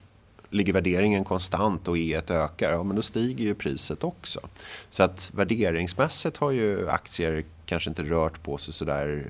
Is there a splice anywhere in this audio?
no; 0 cuts

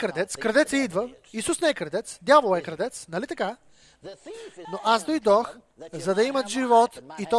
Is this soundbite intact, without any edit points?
no; 1 cut; at 4.6 s

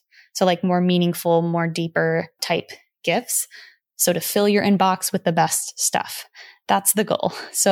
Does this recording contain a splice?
yes; 1 cut; at 3.8 s

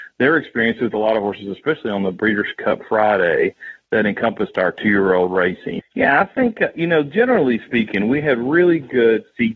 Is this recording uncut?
no; 1 cut; at 5.8 s

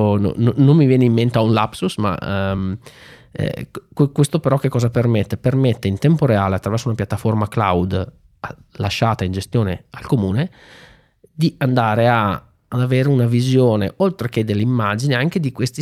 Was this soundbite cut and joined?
no; 0 cuts

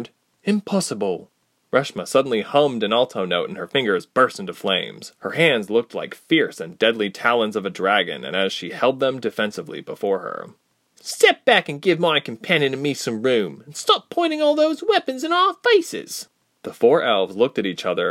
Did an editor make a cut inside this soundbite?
no; 0 cuts

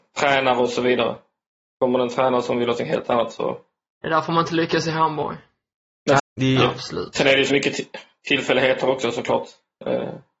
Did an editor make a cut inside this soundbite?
yes; 2 cuts; at 6.2 s, 7.5 s

